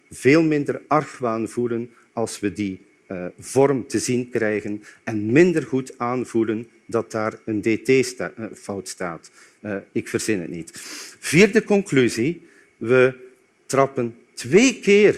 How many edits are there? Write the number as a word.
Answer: one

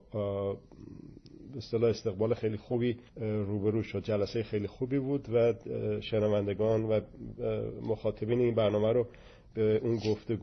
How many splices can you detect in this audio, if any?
one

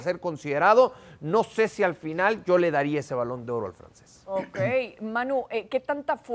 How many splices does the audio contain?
zero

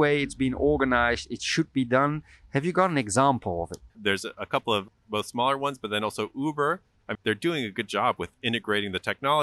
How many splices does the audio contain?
two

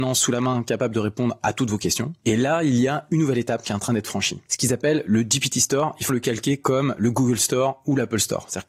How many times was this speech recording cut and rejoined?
one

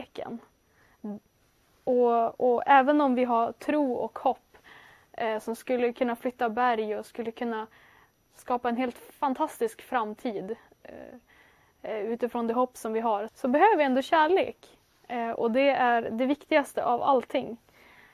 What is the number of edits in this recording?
one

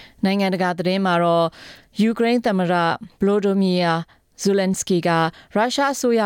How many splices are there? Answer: one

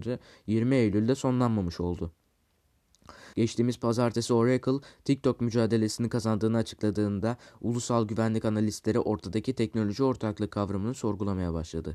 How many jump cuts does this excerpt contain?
one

